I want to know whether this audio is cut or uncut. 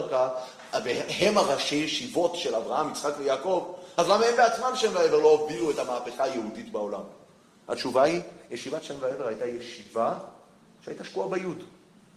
uncut